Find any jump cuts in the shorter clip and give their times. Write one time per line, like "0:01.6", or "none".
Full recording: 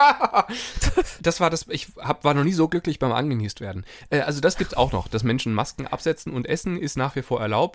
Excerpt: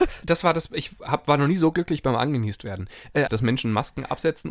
0:03.3